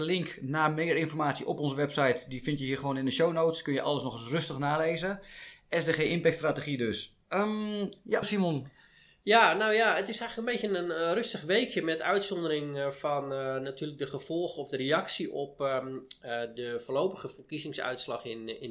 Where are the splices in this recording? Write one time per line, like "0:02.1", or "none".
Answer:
0:08.2